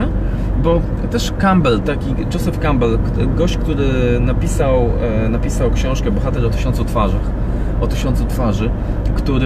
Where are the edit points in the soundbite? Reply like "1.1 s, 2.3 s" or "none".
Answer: none